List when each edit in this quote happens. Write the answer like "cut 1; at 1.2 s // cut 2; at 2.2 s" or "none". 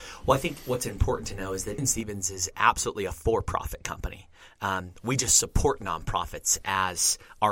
cut 1; at 1.8 s